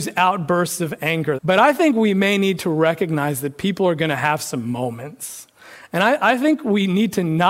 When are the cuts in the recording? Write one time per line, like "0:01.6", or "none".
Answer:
0:01.4